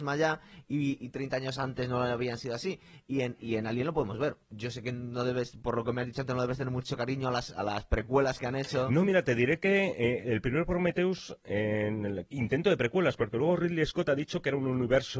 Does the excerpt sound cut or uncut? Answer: cut